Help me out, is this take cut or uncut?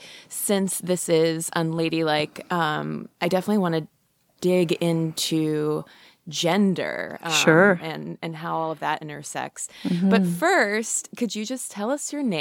uncut